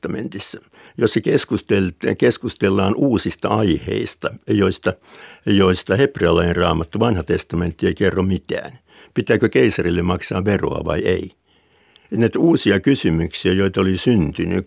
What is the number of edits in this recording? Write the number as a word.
one